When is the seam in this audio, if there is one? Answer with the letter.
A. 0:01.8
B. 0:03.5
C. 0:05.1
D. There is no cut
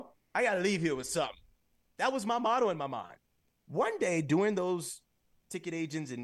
B